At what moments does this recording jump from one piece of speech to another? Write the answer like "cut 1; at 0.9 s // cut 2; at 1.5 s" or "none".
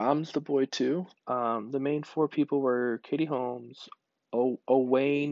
cut 1; at 1.1 s